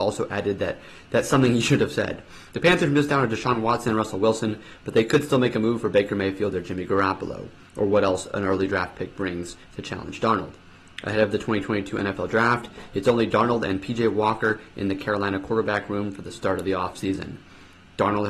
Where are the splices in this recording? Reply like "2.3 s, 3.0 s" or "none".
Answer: none